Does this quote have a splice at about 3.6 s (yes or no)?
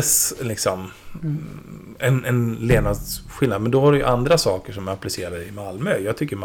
no